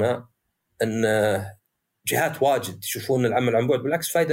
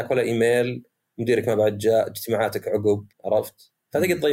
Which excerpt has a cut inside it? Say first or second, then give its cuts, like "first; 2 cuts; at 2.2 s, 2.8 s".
second; 1 cut; at 3.1 s